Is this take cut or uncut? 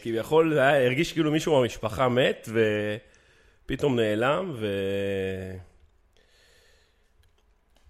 uncut